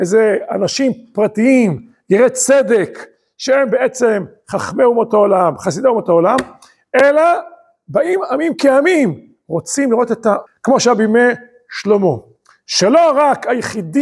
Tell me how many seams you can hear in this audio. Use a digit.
1